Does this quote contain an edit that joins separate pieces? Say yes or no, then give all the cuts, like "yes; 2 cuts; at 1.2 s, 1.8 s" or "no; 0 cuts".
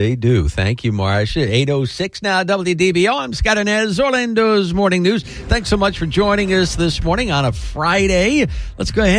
no; 0 cuts